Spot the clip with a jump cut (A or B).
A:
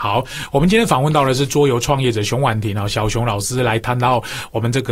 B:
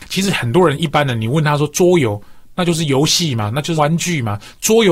B